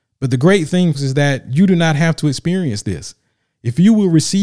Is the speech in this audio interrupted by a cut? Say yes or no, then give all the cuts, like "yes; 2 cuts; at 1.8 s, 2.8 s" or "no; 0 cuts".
yes; 1 cut; at 0.9 s